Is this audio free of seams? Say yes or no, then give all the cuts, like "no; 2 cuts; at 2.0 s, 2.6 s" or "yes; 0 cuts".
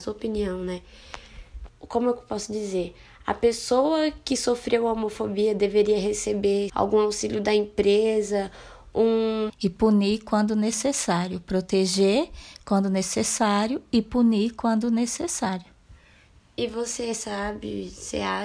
no; 3 cuts; at 1.7 s, 6.7 s, 9.5 s